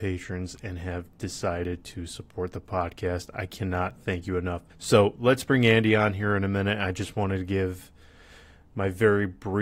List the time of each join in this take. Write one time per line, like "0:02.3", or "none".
0:04.7